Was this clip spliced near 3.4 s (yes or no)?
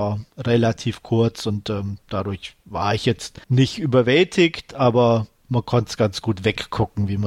yes